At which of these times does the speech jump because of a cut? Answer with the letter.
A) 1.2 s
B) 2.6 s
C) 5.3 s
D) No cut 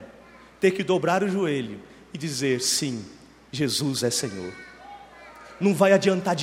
D